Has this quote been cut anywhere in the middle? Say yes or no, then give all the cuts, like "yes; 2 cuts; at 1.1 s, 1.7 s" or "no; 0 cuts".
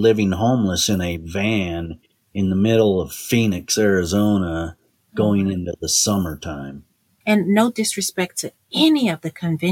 yes; 1 cut; at 7.2 s